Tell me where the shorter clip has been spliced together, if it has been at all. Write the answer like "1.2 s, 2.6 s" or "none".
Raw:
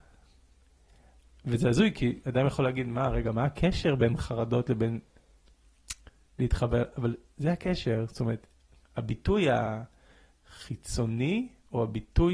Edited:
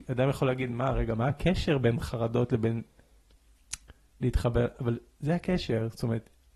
none